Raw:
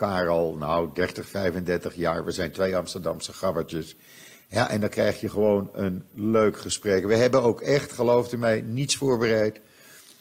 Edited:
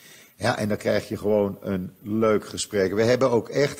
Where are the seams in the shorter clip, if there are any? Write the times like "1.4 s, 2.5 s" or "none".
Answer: none